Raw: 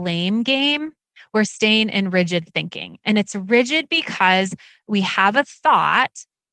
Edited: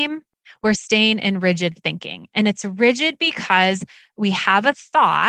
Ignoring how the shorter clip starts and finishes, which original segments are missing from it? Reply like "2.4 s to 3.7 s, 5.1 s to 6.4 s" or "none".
none